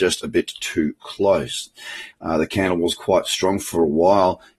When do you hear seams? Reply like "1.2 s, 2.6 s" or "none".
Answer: 2.1 s